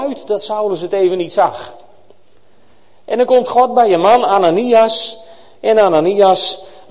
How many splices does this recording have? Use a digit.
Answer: 0